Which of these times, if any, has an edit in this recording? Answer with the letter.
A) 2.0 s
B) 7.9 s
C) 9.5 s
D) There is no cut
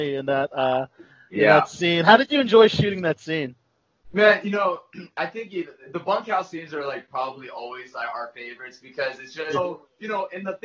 C